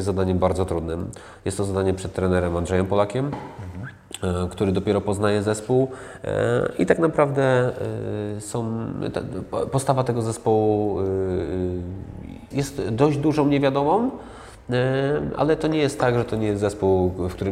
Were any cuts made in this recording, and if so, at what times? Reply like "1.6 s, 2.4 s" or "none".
12.5 s